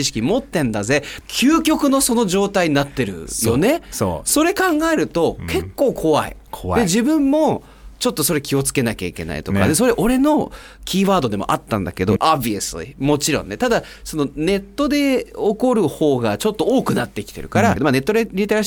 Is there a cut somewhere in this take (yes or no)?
yes